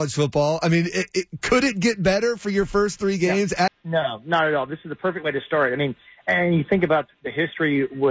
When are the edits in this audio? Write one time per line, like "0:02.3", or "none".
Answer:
0:03.7